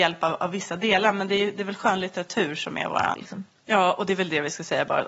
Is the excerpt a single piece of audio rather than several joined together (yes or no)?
no